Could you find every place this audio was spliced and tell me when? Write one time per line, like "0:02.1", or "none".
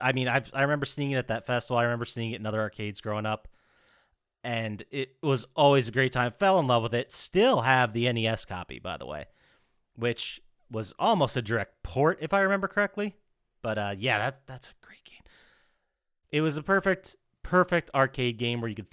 0:16.2

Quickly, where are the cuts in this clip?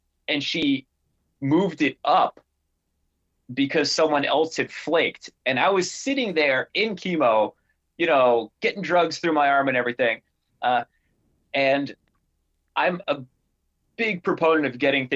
0:10.5

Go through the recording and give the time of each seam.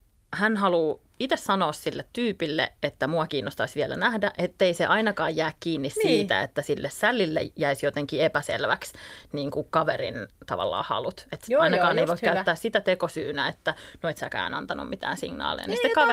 none

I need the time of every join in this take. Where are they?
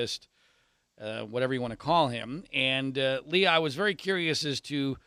none

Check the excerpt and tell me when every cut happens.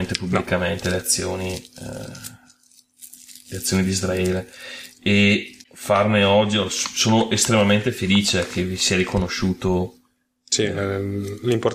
0:05.6

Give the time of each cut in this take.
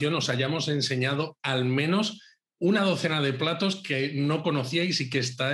none

